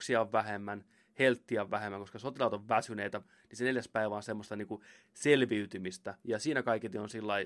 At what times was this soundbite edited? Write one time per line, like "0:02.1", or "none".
0:03.2
0:06.2